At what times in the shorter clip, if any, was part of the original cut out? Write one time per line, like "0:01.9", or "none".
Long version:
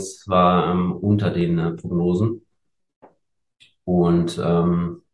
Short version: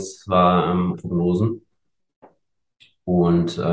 0:00.9